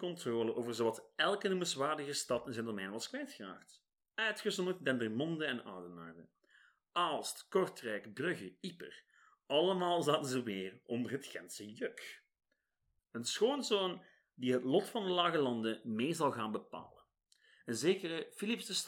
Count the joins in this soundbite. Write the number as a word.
one